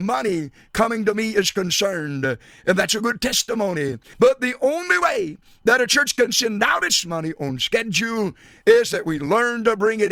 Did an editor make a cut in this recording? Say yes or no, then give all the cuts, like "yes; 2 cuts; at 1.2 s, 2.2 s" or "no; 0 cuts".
yes; 1 cut; at 4.1 s